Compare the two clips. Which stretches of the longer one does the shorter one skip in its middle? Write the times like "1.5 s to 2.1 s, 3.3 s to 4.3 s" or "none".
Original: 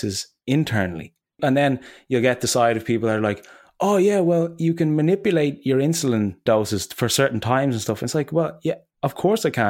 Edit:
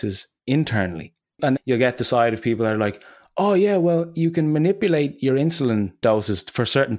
1.6 s to 2.0 s